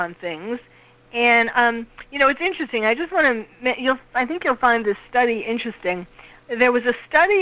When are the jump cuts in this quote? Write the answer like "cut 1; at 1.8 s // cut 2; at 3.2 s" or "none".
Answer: cut 1; at 6.4 s